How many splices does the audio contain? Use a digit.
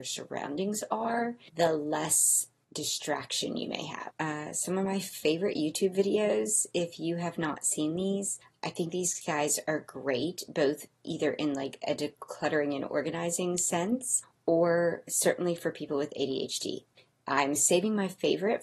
1